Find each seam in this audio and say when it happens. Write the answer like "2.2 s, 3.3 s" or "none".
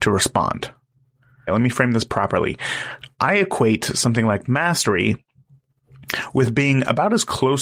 1.5 s